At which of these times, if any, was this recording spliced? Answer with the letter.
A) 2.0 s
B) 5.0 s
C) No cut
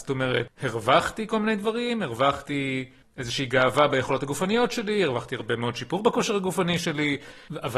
C